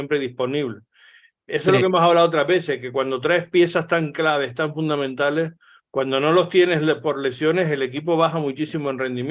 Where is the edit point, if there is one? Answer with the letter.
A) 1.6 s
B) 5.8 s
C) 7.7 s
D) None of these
D